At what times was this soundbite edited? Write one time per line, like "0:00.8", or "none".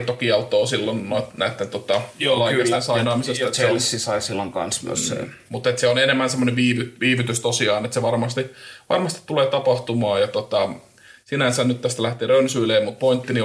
none